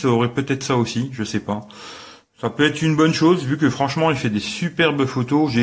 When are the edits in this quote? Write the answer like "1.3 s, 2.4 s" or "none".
none